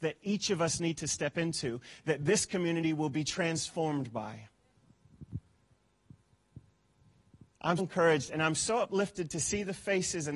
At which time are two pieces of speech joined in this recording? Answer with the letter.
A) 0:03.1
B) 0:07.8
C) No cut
B